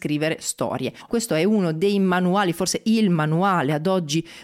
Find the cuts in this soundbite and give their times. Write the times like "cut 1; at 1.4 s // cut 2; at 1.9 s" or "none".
cut 1; at 1.1 s